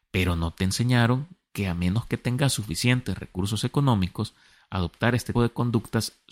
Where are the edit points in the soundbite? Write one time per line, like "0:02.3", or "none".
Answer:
0:05.3